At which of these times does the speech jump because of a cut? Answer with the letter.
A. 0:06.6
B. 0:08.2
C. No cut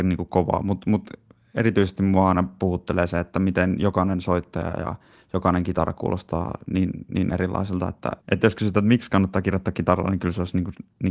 B